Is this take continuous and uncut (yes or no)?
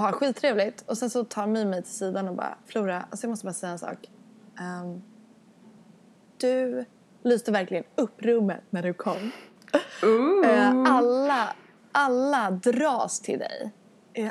yes